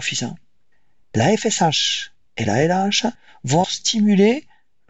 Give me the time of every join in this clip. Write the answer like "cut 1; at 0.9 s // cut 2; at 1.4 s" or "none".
cut 1; at 3.6 s